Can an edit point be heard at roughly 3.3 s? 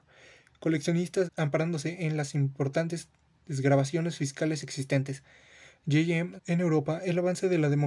no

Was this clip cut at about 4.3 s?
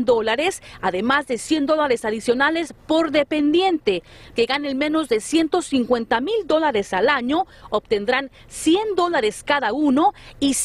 yes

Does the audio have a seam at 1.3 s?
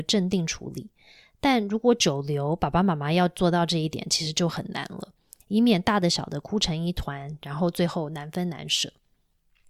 no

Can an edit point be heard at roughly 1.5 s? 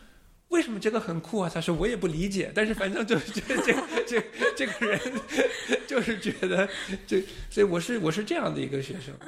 no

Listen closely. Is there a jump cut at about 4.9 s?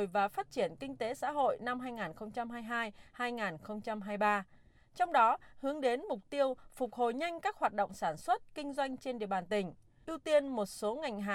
no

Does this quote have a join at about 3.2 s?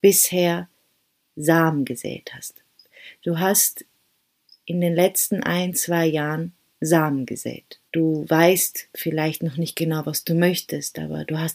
no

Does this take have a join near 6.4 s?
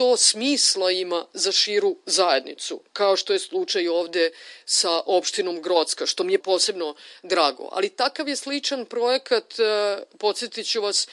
yes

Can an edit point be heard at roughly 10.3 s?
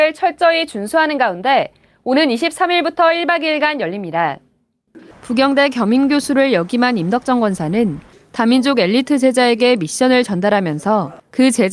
no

